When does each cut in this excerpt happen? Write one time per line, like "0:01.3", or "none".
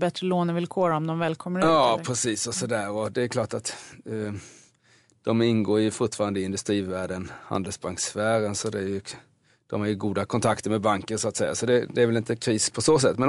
none